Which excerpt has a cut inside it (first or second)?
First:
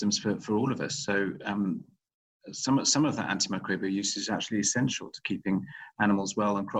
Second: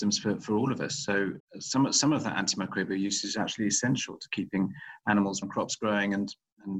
second